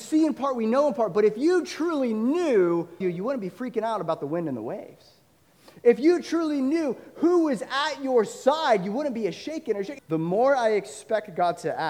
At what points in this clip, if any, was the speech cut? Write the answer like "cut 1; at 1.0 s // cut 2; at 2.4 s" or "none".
cut 1; at 3.0 s // cut 2; at 10.0 s